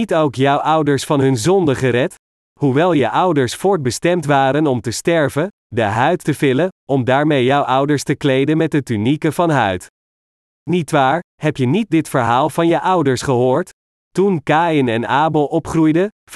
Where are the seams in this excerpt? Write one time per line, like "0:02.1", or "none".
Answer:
0:05.6